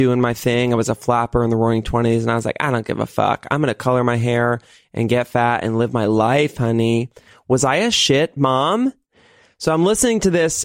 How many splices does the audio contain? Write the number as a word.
zero